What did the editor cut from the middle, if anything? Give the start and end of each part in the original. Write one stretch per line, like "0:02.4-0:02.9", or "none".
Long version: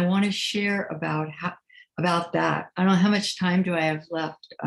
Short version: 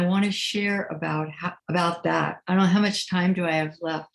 0:01.6-0:01.9